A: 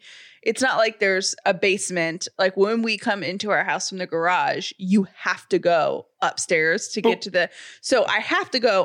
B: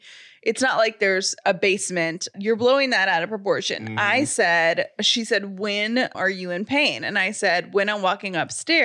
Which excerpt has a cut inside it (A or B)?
B